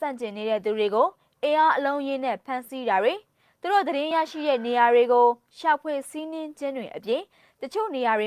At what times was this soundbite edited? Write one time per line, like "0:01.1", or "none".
none